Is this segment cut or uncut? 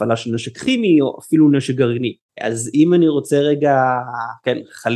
cut